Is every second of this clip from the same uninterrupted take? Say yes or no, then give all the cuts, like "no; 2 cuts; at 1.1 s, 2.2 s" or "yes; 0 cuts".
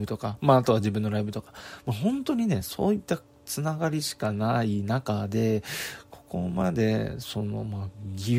yes; 0 cuts